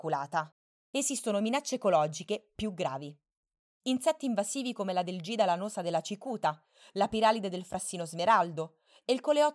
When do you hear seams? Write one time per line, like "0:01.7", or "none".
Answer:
0:03.7